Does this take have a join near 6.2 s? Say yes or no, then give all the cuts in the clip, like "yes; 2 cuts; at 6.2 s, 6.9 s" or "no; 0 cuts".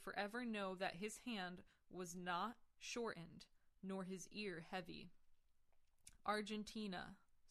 yes; 1 cut; at 6.2 s